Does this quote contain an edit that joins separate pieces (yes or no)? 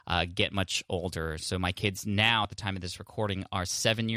no